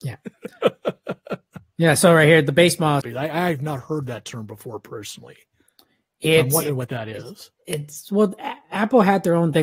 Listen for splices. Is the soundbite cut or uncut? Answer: cut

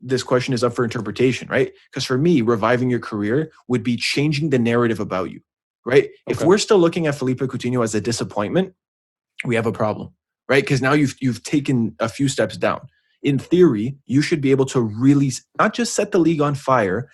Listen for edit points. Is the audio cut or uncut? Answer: uncut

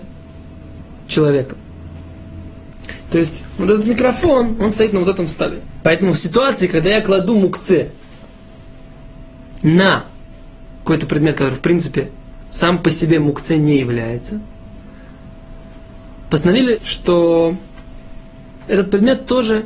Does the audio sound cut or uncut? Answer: cut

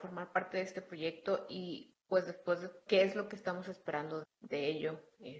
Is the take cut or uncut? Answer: cut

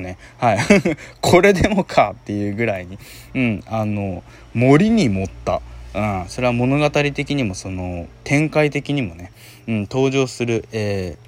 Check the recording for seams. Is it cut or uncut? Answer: uncut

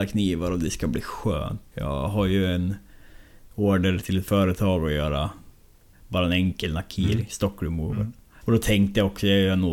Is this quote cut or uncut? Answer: cut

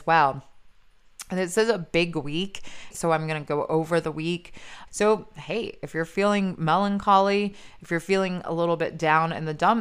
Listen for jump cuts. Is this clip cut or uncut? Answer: cut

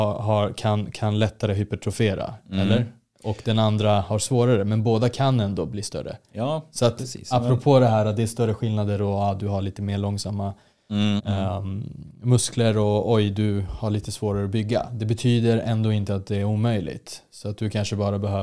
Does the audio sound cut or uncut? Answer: cut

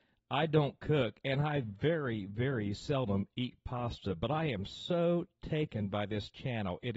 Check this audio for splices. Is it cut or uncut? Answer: uncut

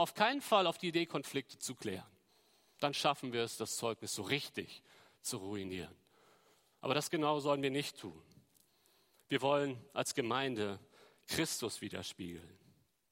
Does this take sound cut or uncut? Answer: uncut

